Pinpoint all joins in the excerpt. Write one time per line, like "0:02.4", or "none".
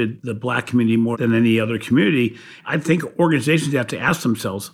0:01.1
0:02.6